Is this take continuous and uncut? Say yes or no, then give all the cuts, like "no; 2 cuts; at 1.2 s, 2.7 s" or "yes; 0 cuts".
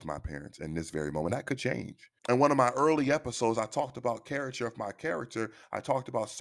no; 1 cut; at 2.2 s